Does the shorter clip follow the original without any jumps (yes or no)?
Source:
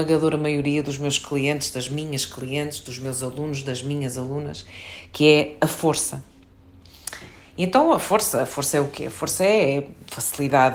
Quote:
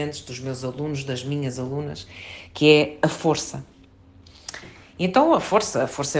yes